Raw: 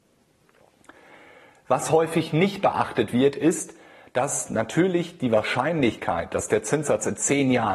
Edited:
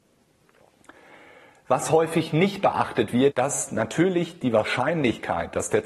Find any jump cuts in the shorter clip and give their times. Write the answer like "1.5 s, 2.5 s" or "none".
3.3 s